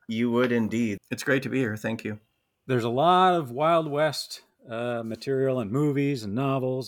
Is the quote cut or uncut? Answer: cut